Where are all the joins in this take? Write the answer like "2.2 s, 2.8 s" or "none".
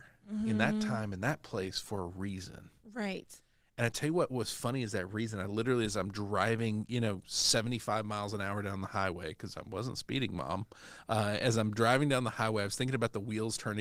none